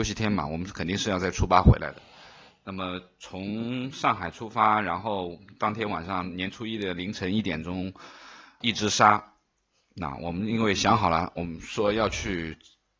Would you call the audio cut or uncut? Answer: cut